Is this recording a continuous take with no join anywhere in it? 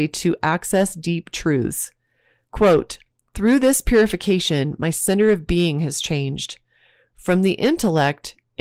yes; 0 cuts

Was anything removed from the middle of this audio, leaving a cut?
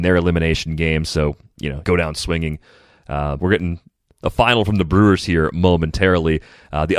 yes; 2 cuts; at 1.8 s, 3.4 s

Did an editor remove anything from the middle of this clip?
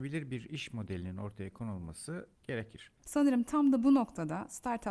yes; 1 cut; at 3.0 s

